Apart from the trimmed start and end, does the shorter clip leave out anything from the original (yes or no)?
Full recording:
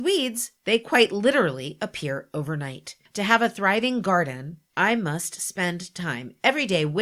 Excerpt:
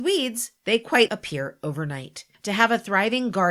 yes